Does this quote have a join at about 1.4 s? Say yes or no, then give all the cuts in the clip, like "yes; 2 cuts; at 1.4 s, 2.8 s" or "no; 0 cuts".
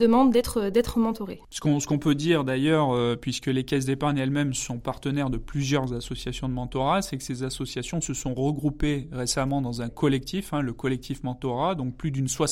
no; 0 cuts